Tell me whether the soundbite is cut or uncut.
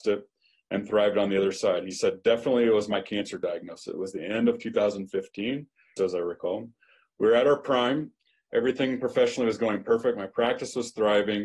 cut